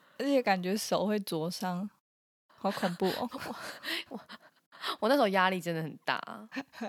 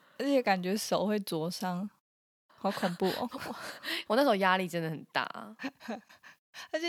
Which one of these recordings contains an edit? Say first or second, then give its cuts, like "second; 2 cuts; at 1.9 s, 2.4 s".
second; 1 cut; at 4.0 s